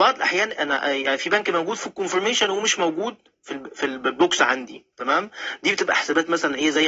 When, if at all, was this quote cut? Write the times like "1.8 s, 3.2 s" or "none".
4.9 s